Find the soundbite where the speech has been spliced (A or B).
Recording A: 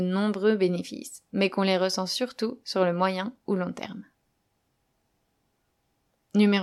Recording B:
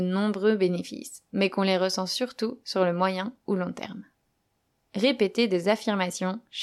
B